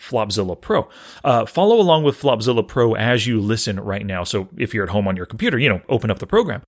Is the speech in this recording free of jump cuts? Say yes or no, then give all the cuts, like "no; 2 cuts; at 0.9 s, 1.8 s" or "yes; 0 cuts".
yes; 0 cuts